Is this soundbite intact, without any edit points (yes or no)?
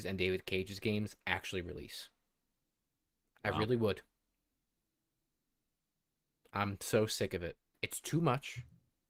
no